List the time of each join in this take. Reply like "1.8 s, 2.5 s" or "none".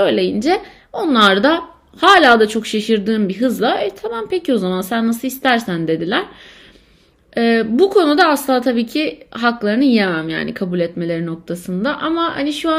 none